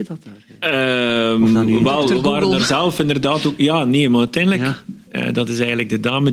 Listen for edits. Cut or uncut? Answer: cut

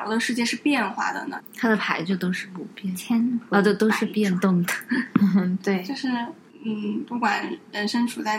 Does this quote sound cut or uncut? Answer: cut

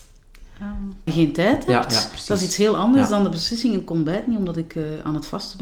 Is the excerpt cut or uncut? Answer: cut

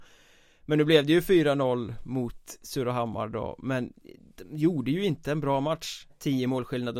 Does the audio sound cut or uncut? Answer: cut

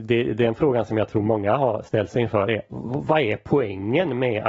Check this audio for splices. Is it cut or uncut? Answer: uncut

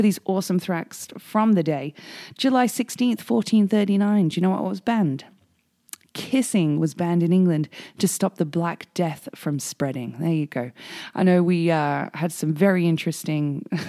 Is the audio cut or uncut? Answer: uncut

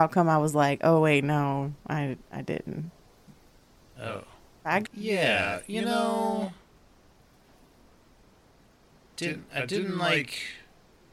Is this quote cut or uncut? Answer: cut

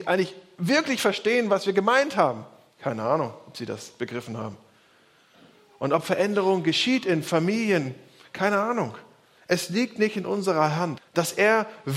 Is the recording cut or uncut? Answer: cut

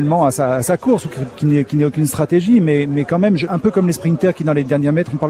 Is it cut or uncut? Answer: cut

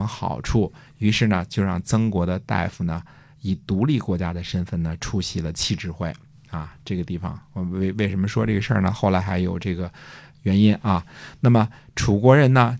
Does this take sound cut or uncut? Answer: uncut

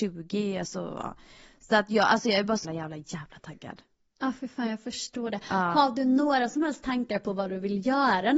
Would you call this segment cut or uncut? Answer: cut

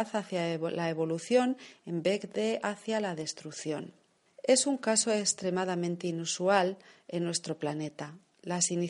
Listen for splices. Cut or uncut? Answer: cut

